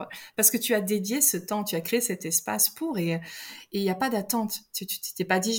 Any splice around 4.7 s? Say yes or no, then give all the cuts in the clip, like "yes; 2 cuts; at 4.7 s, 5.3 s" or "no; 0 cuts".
no; 0 cuts